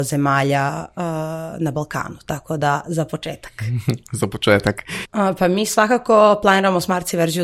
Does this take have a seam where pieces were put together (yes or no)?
yes